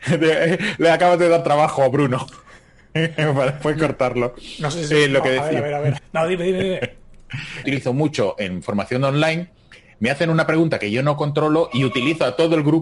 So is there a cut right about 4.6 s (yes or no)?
no